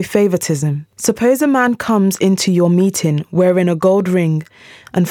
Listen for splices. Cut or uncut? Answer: cut